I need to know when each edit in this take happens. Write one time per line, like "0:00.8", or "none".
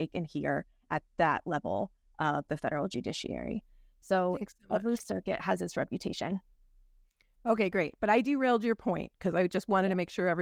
none